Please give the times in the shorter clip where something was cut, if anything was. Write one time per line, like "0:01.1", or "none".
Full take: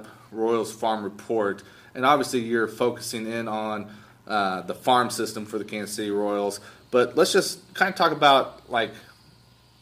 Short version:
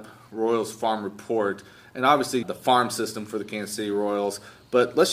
0:02.4